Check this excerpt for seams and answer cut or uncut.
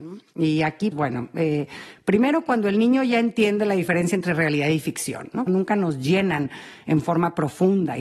cut